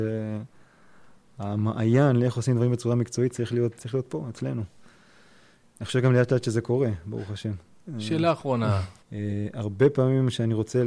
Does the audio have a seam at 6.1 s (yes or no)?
no